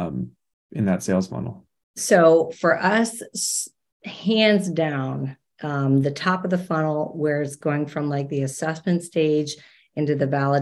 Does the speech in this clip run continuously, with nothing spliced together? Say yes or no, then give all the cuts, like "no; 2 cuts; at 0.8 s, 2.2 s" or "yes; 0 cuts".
yes; 0 cuts